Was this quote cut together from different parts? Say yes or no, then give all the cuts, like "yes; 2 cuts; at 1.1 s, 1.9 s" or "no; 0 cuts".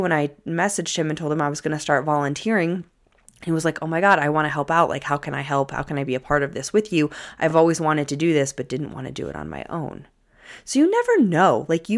no; 0 cuts